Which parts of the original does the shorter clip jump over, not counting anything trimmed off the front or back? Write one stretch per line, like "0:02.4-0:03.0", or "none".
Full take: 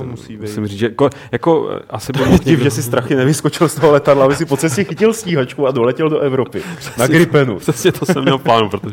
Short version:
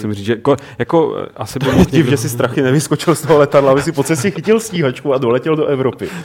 none